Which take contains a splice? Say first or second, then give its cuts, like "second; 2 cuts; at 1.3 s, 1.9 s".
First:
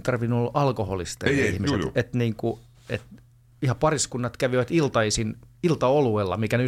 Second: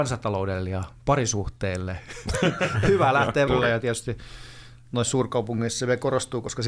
second; 1 cut; at 3.5 s